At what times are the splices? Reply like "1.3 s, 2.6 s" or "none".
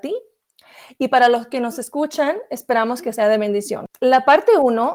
none